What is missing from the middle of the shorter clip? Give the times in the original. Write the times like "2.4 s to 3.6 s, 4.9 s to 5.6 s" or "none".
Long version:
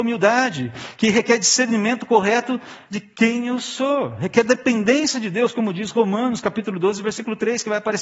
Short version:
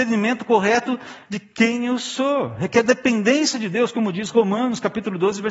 none